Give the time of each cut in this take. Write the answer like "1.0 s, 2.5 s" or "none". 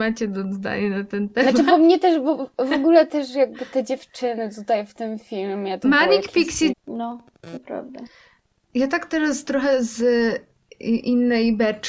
6.7 s